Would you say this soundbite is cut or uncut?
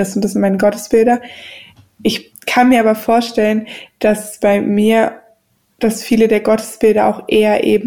uncut